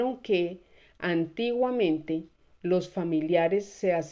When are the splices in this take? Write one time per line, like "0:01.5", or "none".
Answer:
0:02.5